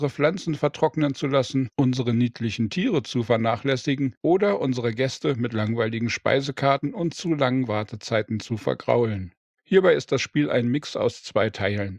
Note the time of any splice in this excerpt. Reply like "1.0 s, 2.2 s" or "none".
9.5 s